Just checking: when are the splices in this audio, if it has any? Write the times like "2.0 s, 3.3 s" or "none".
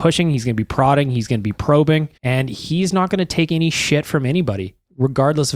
2.2 s